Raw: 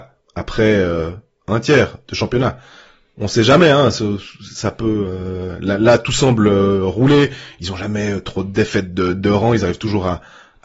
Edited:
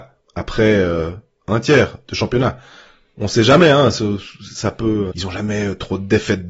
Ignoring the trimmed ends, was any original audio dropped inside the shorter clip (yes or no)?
yes